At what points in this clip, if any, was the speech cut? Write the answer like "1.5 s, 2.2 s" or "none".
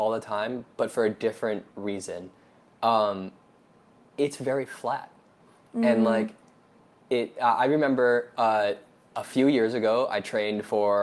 none